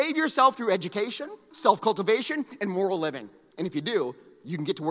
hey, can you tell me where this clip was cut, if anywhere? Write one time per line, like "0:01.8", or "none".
0:01.5
0:03.5